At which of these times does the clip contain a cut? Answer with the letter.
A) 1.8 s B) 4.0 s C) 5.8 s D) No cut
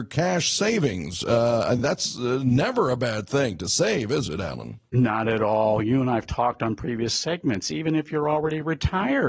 D